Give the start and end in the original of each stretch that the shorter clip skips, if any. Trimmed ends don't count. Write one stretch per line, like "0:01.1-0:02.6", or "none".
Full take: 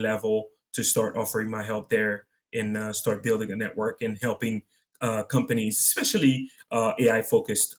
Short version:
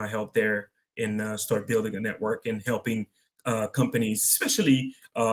none